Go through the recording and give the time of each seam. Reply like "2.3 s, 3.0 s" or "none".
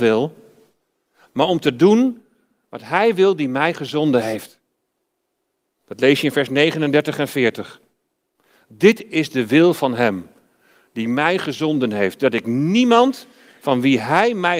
5.7 s